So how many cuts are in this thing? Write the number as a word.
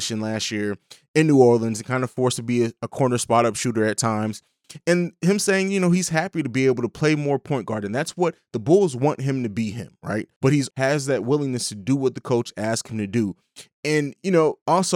one